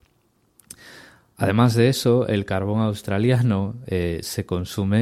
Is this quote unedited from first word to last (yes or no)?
yes